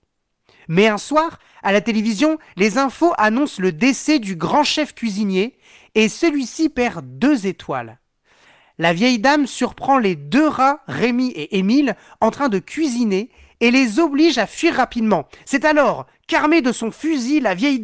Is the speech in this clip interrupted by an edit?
no; 0 cuts

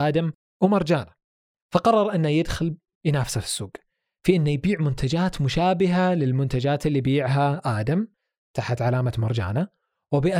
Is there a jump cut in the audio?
no; 0 cuts

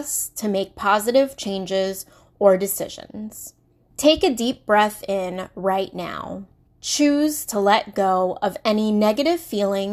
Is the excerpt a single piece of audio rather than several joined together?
no; 2 cuts; at 3.9 s, 6.7 s

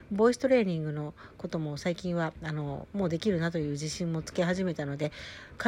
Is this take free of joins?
yes; 0 cuts

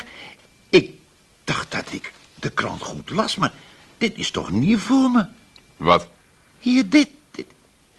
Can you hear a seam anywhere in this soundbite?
no; 0 cuts

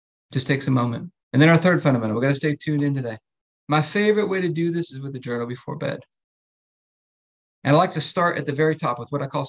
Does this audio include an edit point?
yes; 2 cuts; at 1.2 s, 3.5 s

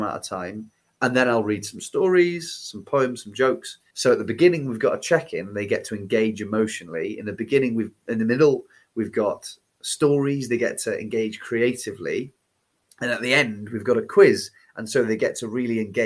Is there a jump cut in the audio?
yes; 1 cut; at 3.9 s

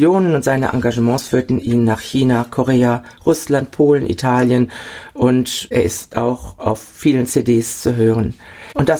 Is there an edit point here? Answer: no; 0 cuts

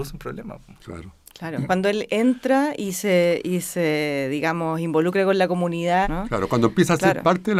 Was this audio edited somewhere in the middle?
yes; 2 cuts; at 1.7 s, 6.0 s

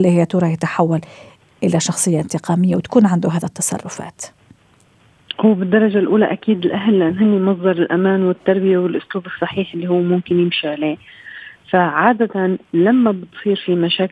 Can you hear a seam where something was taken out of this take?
no; 0 cuts

